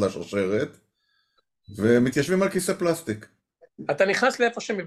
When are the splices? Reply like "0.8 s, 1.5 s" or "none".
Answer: none